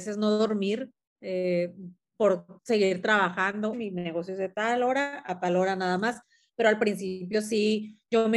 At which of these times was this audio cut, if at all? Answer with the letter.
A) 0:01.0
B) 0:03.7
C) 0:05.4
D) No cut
B